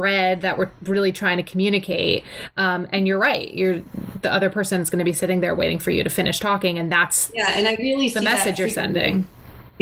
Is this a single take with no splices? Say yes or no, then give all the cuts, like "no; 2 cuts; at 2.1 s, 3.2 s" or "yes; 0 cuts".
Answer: yes; 0 cuts